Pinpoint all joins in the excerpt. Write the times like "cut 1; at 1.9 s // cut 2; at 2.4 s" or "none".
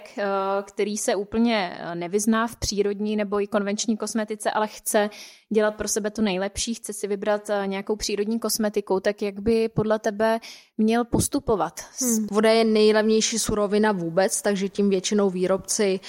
cut 1; at 12.3 s